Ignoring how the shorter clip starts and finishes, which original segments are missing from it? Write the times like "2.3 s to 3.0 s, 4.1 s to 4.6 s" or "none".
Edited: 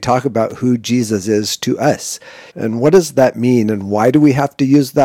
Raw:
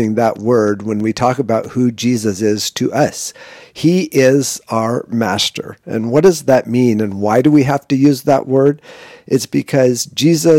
3.6 s to 5.8 s